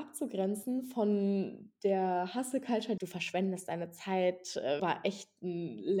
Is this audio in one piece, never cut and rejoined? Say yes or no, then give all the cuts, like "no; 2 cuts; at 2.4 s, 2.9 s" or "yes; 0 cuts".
no; 2 cuts; at 3.0 s, 4.8 s